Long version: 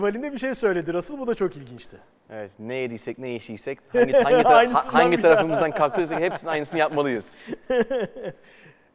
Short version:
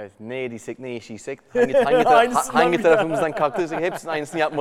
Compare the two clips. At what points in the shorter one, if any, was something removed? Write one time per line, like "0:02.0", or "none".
none